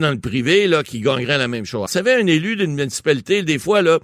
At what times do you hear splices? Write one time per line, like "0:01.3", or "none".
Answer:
0:01.9